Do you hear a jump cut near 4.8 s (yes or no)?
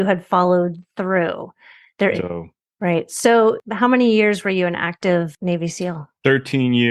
no